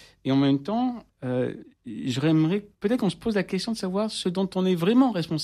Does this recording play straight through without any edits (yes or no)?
no